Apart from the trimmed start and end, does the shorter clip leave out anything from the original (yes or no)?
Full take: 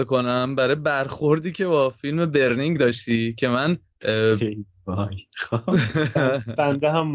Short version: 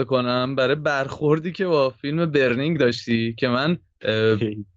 no